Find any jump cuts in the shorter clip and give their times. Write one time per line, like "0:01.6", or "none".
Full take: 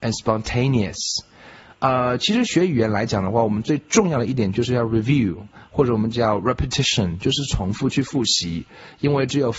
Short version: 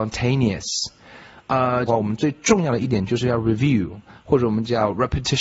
0:01.9